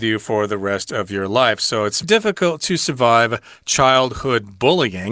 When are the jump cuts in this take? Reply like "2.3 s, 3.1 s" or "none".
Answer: 2.0 s